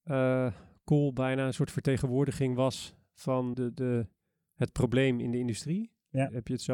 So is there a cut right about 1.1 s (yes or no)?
no